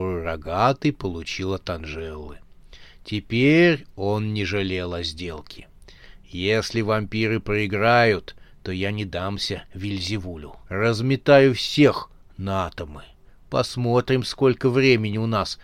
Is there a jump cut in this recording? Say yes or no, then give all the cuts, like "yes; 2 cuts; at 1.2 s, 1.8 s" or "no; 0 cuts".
yes; 1 cut; at 10.6 s